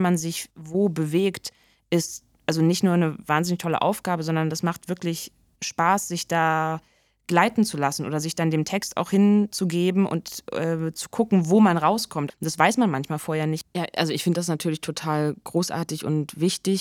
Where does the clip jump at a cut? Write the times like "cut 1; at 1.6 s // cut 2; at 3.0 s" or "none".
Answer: cut 1; at 12.3 s // cut 2; at 13.6 s